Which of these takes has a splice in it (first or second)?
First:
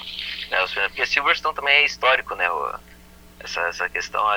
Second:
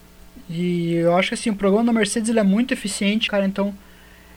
second